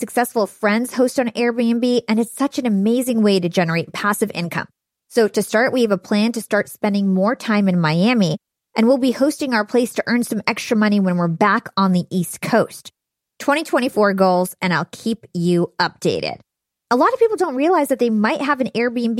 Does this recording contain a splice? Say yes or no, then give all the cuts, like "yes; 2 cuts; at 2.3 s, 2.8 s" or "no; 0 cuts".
no; 0 cuts